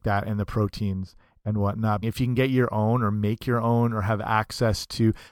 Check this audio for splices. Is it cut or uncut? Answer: cut